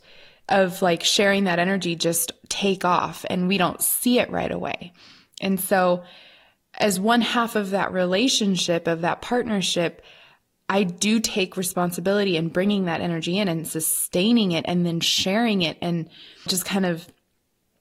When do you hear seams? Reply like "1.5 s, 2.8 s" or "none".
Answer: 16.5 s